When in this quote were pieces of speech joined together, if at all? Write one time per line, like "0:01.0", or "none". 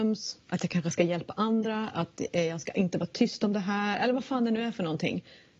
none